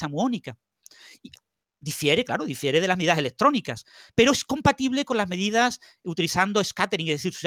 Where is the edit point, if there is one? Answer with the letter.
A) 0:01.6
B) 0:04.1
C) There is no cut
B